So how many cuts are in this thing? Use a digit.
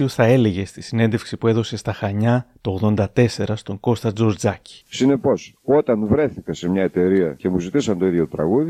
1